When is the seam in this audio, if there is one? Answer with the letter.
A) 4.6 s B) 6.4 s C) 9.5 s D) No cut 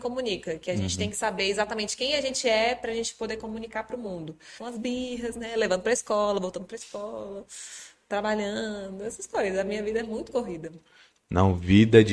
A